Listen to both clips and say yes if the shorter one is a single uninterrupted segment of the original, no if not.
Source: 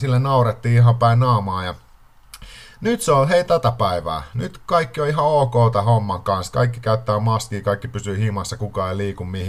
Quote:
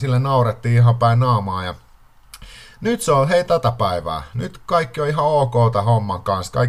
yes